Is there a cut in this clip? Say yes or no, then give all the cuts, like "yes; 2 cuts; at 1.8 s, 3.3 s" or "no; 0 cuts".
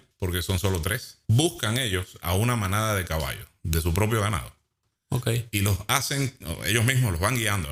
yes; 1 cut; at 1.2 s